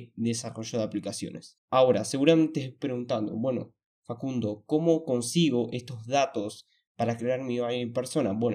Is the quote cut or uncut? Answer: cut